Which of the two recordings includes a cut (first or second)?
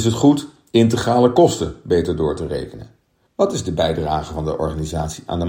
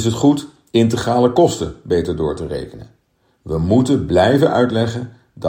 first